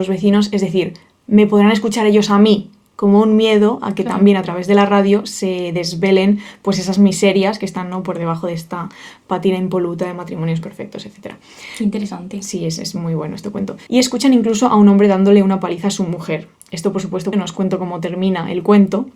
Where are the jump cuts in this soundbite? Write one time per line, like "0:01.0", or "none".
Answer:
0:13.9
0:17.3

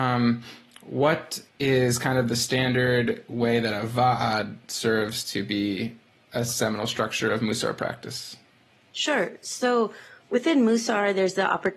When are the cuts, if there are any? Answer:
0:01.5

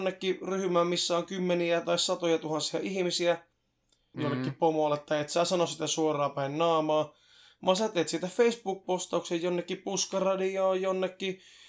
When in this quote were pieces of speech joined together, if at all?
0:04.1

